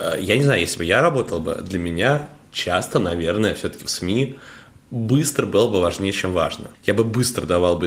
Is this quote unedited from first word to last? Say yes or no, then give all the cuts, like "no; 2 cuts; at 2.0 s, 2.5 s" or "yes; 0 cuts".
no; 1 cut; at 6.7 s